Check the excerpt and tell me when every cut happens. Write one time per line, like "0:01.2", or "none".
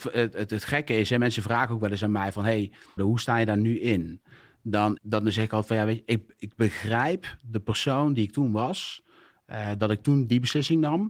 0:03.0
0:05.0